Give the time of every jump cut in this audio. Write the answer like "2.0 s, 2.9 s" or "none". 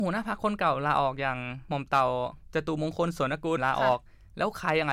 3.6 s